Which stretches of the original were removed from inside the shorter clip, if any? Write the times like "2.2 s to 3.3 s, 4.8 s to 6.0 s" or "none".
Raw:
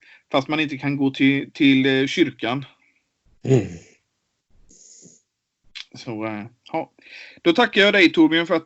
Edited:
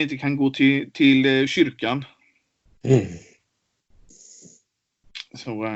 none